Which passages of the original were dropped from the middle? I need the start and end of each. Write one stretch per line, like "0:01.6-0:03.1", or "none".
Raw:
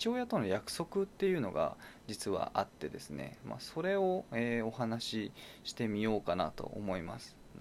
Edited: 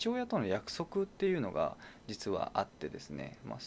none